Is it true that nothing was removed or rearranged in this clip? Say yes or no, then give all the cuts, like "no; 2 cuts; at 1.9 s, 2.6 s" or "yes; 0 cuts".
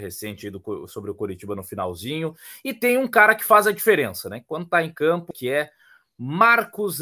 no; 1 cut; at 5.3 s